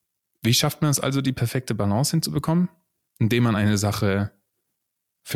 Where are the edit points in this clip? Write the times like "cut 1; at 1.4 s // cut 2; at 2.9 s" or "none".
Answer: none